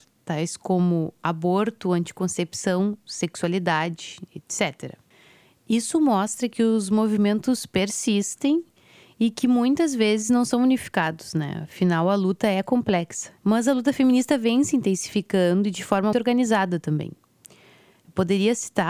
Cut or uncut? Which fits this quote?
cut